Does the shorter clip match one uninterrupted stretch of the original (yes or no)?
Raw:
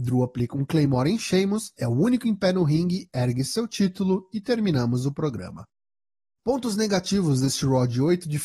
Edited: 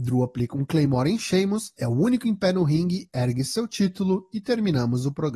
yes